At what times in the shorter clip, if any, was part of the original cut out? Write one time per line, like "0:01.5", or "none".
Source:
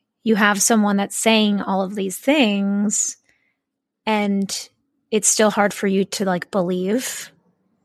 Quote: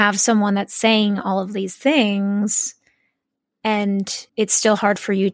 0:04.3